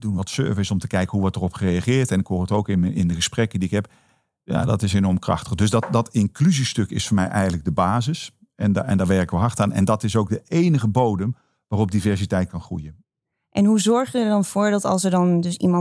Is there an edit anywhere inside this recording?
no; 0 cuts

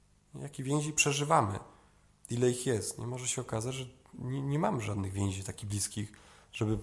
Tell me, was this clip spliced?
yes; 1 cut; at 4.1 s

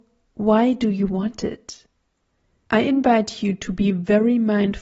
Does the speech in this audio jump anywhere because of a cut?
yes; 1 cut; at 2.6 s

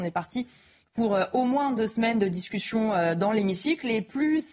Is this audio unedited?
yes; 0 cuts

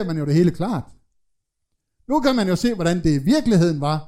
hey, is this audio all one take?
yes; 0 cuts

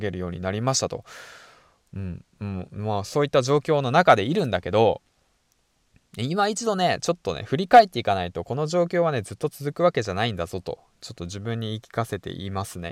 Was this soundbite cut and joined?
no; 0 cuts

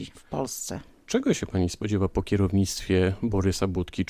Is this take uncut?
yes; 0 cuts

